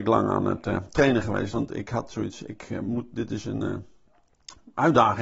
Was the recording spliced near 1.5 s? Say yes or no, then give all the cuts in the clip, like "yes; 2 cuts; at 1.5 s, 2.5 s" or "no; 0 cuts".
no; 0 cuts